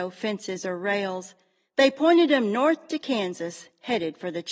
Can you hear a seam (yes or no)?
no